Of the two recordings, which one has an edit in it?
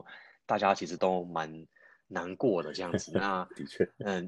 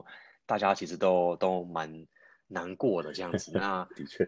first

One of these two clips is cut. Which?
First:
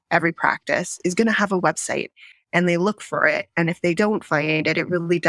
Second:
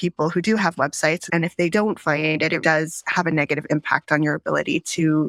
second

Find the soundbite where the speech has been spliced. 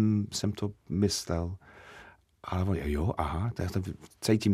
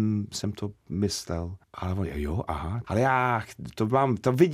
second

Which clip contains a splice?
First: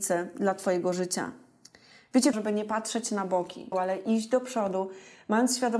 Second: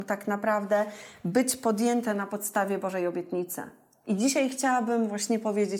first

